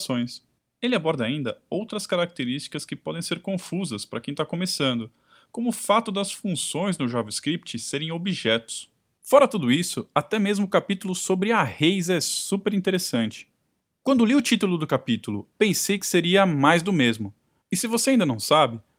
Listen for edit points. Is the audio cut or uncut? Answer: cut